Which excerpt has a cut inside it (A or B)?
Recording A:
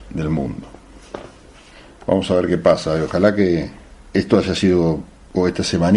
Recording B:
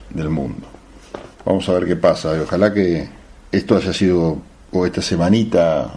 B